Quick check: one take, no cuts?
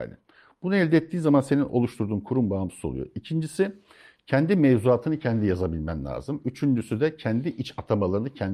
yes; 0 cuts

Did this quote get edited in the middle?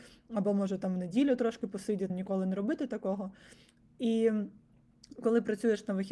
yes; 1 cut; at 2.1 s

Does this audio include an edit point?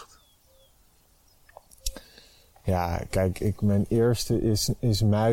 no; 0 cuts

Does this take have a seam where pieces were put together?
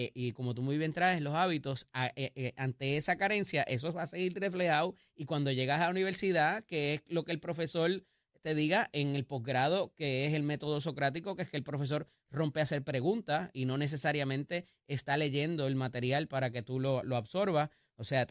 no; 0 cuts

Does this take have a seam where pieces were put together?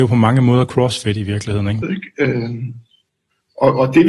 yes; 1 cut; at 1.8 s

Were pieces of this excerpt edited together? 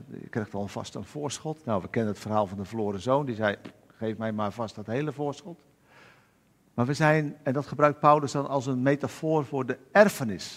no; 0 cuts

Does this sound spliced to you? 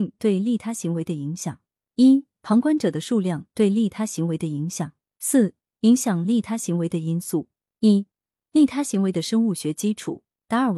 yes; 1 cut; at 5.1 s

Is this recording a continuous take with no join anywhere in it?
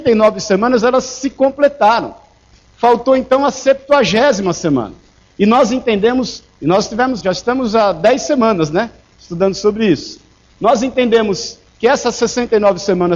no; 1 cut; at 7.2 s

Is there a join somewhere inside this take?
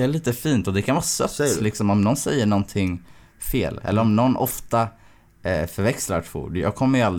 no; 0 cuts

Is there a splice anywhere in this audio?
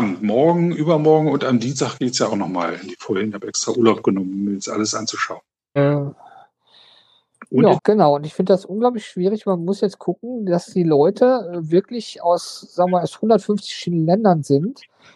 yes; 2 cuts; at 5.8 s, 7.8 s

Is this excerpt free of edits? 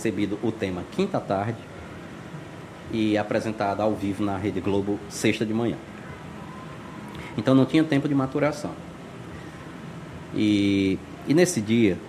yes; 0 cuts

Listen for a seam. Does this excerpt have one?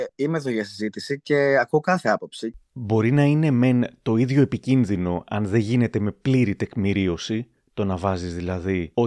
no; 0 cuts

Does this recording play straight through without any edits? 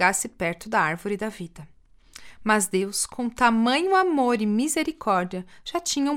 yes; 0 cuts

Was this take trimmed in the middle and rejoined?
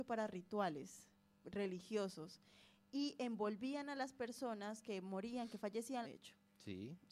yes; 1 cut; at 6.0 s

